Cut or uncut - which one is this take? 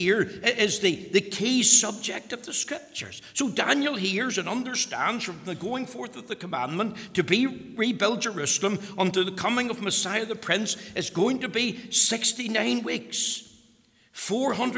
uncut